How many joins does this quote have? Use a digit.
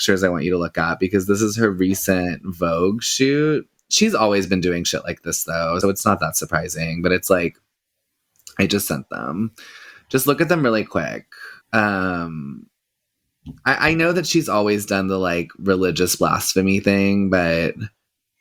2